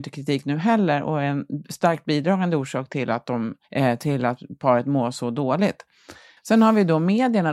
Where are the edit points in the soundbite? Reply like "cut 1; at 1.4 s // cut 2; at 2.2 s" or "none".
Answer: cut 1; at 3.6 s // cut 2; at 6.4 s